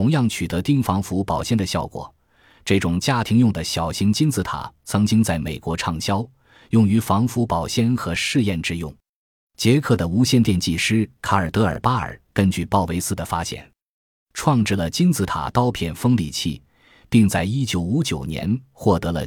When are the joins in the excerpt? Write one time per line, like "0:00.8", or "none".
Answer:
none